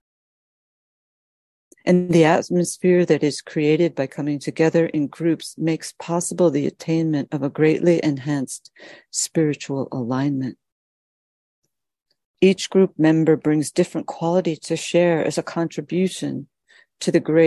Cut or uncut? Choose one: uncut